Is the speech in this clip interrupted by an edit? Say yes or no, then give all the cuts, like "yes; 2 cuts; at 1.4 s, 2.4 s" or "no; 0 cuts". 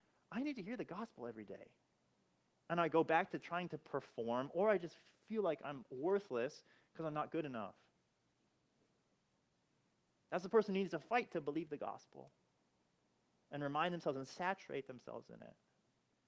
yes; 1 cut; at 2.5 s